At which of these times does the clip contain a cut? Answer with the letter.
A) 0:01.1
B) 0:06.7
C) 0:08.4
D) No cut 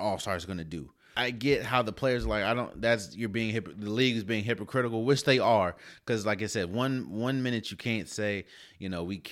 A